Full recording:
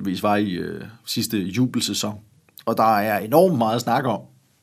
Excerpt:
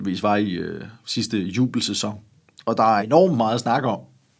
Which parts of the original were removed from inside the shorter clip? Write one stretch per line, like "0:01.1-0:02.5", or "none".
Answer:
0:03.0-0:03.2